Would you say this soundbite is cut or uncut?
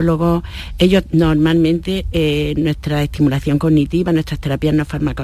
uncut